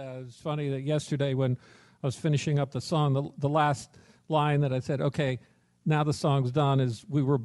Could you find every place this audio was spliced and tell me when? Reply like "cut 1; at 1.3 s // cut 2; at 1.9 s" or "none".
none